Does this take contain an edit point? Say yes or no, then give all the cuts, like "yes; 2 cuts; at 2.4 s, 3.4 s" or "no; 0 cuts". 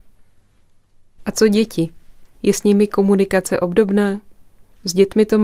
yes; 1 cut; at 1.2 s